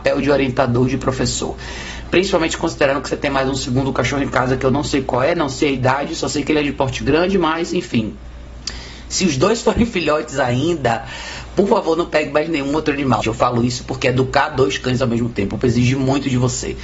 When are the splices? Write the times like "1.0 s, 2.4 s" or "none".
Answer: 13.2 s, 15.6 s